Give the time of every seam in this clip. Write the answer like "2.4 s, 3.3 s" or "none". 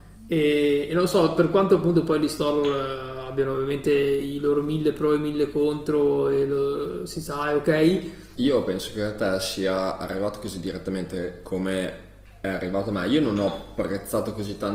8.4 s